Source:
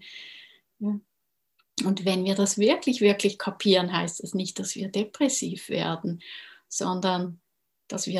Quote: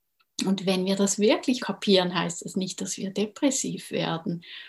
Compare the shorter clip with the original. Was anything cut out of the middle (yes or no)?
yes